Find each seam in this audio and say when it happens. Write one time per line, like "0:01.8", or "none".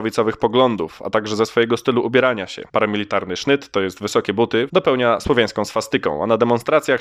0:02.7
0:04.7